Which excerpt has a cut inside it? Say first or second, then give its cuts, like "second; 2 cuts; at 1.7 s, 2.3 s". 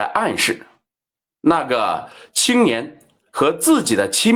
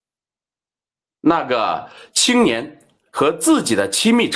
second; 1 cut; at 1.1 s